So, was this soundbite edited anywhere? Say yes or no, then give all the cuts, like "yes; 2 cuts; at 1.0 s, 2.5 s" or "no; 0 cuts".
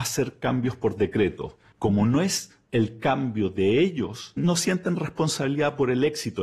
yes; 2 cuts; at 1.7 s, 4.4 s